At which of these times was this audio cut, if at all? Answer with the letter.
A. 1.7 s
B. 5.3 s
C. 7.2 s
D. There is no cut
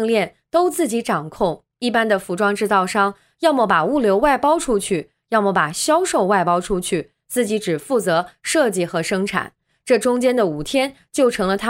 D